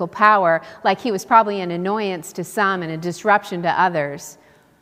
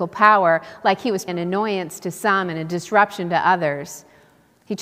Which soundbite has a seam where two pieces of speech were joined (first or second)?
second